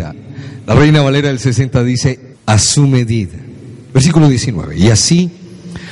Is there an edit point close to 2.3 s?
yes; 1 cut; at 2.3 s

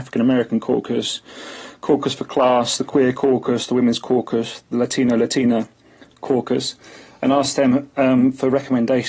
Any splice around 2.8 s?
no; 0 cuts

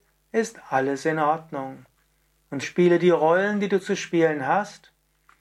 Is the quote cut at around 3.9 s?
no; 1 cut; at 2.6 s

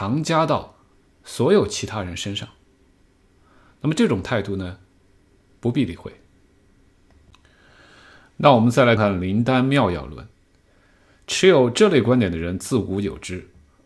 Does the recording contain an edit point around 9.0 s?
yes; 1 cut; at 9.0 s

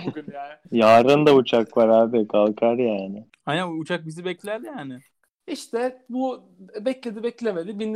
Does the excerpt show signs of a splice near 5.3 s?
no; 0 cuts

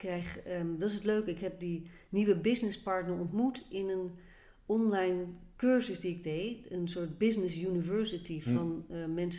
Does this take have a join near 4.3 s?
no; 0 cuts

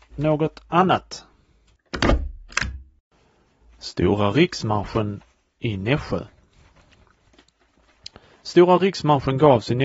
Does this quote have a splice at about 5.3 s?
no; 0 cuts

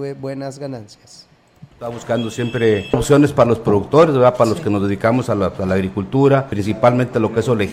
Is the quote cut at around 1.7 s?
yes; 1 cut; at 1.7 s

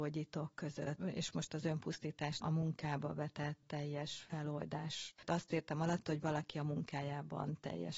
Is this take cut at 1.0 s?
yes; 1 cut; at 1.0 s

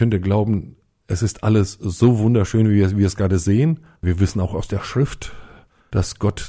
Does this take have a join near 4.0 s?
yes; 1 cut; at 4.0 s

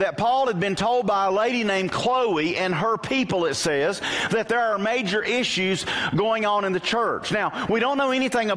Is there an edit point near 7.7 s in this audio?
no; 0 cuts

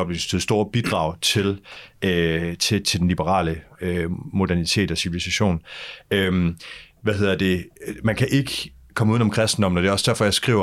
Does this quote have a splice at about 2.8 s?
yes; 1 cut; at 2.8 s

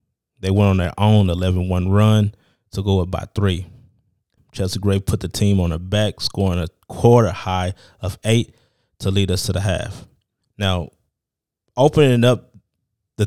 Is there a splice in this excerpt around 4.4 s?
yes; 2 cuts; at 4.4 s, 10.4 s

